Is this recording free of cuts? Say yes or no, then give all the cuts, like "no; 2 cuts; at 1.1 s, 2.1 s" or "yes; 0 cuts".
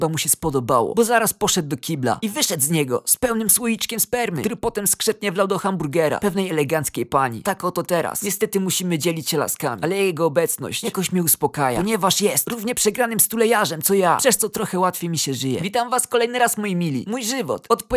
yes; 0 cuts